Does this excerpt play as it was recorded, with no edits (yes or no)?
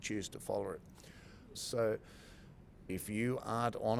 no